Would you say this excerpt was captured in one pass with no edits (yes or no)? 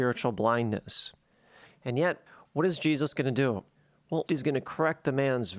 no